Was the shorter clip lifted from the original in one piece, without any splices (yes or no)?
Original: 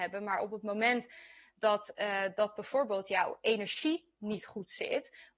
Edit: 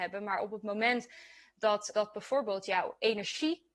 no